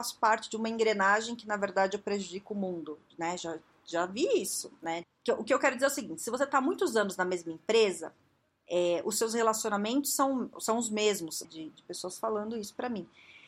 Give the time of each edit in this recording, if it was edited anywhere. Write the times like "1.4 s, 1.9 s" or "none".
5.0 s, 11.4 s